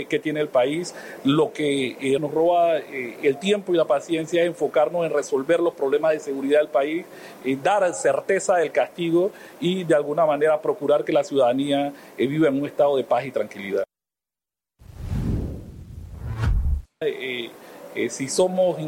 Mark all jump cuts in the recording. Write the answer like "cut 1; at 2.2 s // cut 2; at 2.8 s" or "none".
cut 1; at 2.2 s // cut 2; at 17.0 s

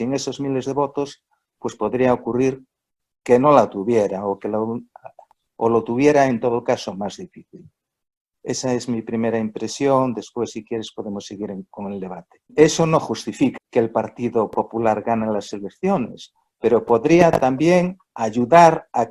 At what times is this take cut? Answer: cut 1; at 12.5 s // cut 2; at 13.6 s

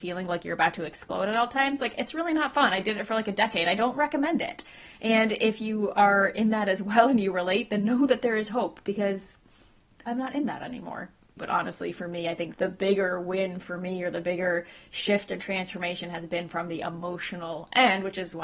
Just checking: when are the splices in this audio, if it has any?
cut 1; at 11.4 s // cut 2; at 12.5 s

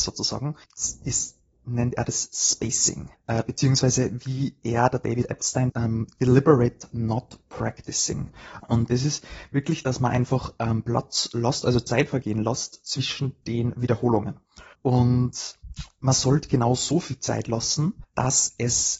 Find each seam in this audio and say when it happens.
cut 1; at 5.7 s // cut 2; at 8.6 s

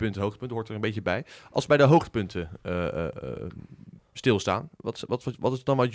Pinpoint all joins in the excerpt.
none

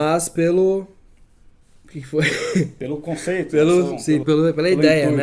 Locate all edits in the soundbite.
cut 1; at 4.2 s

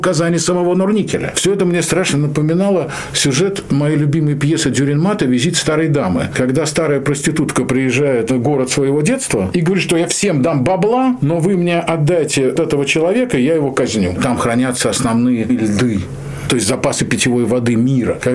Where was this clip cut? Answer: cut 1; at 12.6 s // cut 2; at 14.2 s

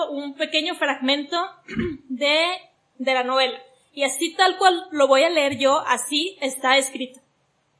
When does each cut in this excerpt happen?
none

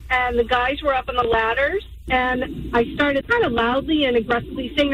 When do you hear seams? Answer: cut 1; at 2.0 s // cut 2; at 3.2 s

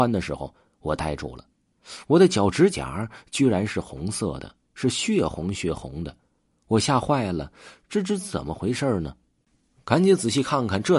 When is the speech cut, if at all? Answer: none

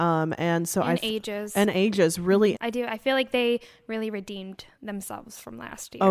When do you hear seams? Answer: cut 1; at 2.5 s

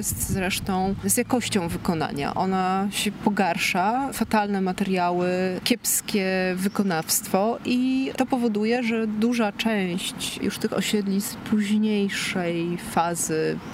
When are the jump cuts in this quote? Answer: cut 1; at 5.6 s

